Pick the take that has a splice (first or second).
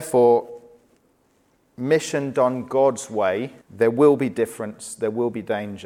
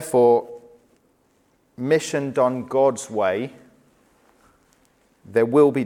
first